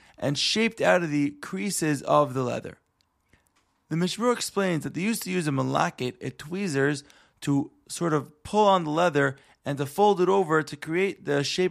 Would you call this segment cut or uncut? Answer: uncut